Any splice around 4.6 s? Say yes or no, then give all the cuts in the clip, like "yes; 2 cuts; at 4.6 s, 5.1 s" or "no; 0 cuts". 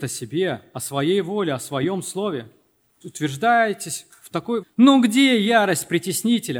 yes; 2 cuts; at 3.0 s, 4.6 s